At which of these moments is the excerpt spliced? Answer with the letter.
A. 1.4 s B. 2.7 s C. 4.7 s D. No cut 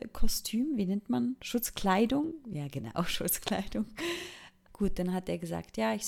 C